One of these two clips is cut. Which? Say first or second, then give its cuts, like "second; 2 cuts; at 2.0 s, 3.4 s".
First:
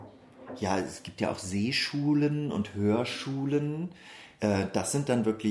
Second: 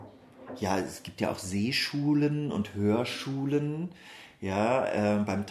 first; 1 cut; at 4.4 s